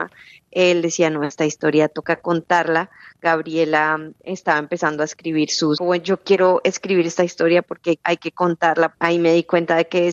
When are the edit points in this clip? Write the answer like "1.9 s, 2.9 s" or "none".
5.8 s, 8.9 s